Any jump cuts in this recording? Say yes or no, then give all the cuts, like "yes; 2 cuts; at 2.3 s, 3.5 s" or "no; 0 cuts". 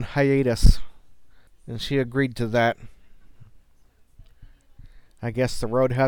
yes; 1 cut; at 1.5 s